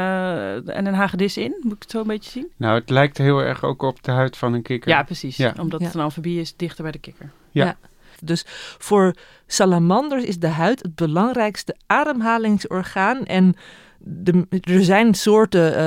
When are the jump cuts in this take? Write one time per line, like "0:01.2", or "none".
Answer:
0:08.1